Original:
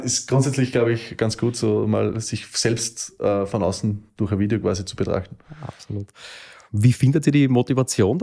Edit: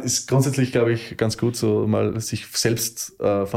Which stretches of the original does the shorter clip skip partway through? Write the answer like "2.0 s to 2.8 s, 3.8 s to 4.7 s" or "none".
none

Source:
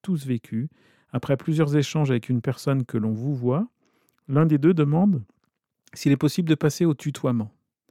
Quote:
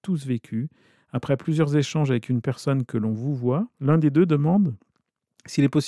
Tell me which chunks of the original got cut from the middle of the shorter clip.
3.7 s to 4.2 s

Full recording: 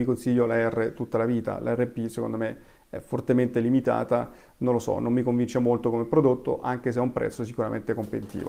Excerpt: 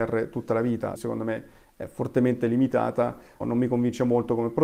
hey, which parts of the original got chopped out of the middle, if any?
1.6 s to 2.1 s, 4.5 s to 5.0 s

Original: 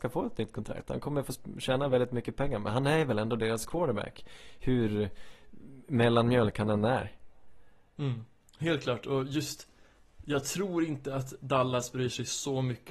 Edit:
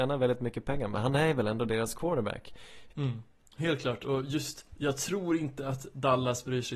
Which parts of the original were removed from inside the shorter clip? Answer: 4.6 s to 7.9 s, 9.7 s to 10.2 s

